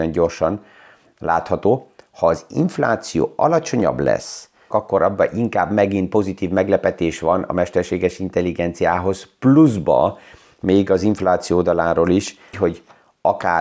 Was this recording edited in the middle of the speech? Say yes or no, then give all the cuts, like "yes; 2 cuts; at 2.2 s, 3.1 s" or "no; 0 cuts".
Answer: yes; 2 cuts; at 4.7 s, 12.5 s